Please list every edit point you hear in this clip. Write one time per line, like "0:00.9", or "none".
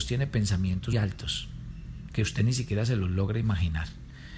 0:00.9